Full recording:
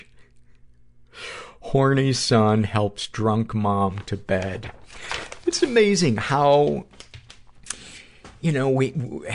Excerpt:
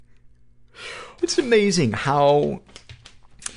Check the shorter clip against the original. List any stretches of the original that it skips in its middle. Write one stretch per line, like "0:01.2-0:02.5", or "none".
0:01.6-0:05.4